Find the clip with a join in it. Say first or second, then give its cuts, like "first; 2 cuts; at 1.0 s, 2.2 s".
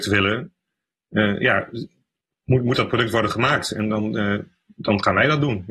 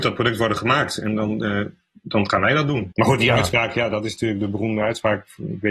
second; 1 cut; at 2.9 s